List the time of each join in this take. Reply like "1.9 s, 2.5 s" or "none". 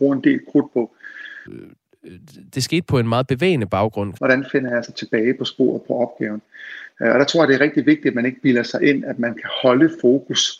1.5 s, 4.2 s